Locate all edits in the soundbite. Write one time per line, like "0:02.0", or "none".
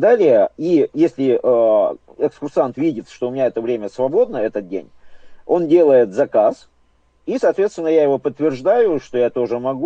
none